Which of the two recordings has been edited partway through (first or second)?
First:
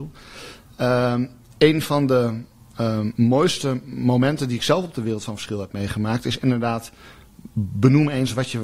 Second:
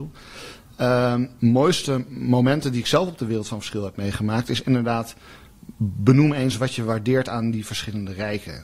second